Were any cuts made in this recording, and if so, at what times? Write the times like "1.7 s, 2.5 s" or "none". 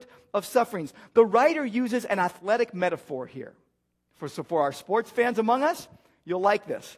none